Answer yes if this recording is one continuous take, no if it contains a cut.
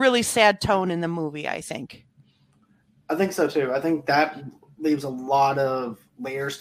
yes